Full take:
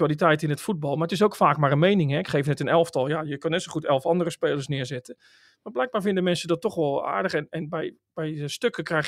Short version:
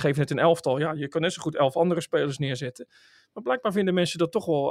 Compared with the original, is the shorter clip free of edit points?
yes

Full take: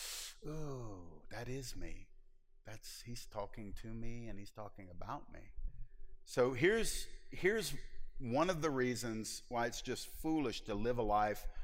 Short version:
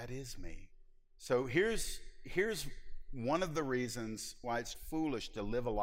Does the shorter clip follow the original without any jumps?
no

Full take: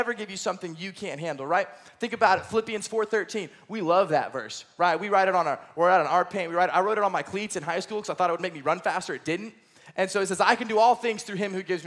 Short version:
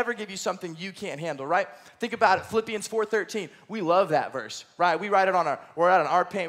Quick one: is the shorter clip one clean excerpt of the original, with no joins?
yes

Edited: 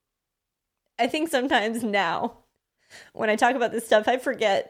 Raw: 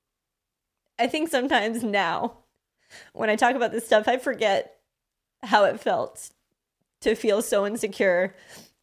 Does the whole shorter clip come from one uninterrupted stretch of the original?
yes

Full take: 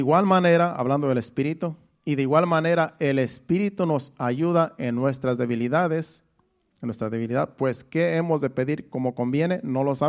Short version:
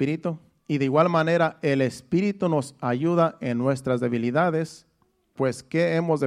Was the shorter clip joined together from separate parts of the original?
yes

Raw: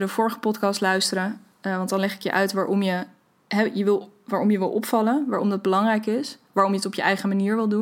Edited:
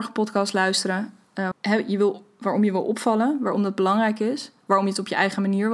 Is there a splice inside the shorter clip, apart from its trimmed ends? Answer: yes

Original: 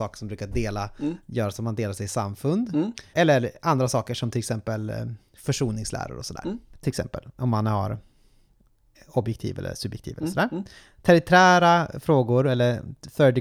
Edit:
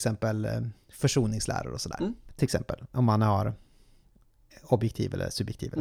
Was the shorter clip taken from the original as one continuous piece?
yes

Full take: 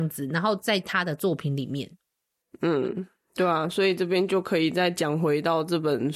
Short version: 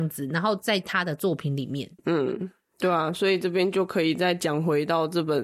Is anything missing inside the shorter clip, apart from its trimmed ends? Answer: yes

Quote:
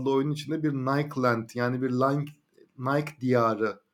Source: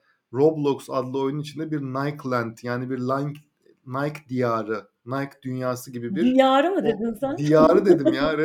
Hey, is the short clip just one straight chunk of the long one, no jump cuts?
yes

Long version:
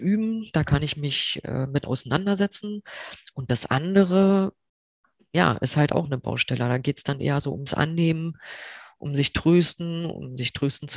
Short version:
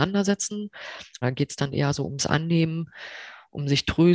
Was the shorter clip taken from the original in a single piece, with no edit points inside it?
no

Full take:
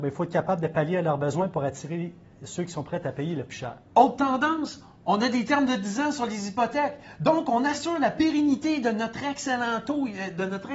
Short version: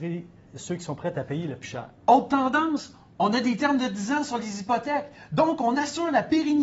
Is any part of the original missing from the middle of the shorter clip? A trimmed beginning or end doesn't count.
no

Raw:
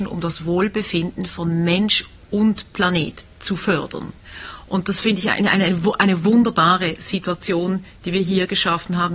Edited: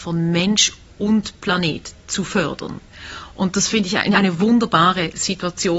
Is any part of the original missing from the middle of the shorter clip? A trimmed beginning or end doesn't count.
yes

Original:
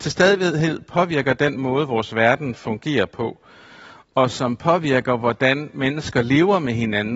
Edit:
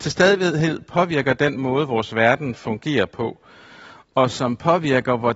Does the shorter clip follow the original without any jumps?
yes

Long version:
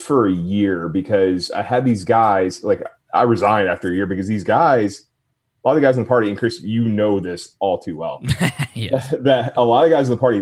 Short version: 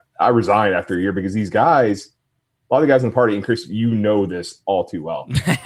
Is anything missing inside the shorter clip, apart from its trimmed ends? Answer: no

